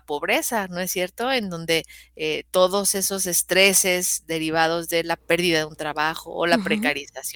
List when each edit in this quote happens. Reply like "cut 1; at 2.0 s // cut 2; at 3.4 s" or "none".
none